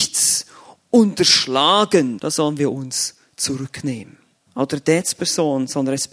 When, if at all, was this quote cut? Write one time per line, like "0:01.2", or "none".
0:02.2
0:04.5